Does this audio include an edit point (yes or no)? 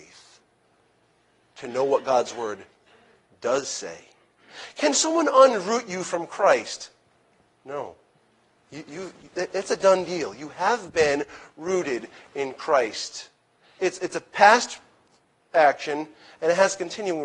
no